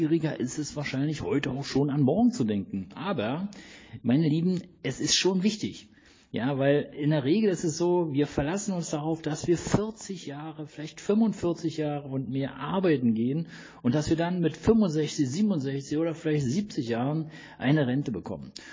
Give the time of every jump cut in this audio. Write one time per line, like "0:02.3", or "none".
none

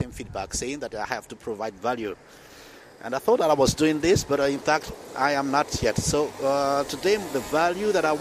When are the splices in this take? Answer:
none

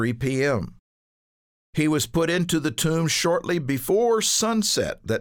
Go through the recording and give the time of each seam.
none

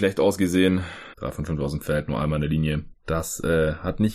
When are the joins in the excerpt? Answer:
0:01.1

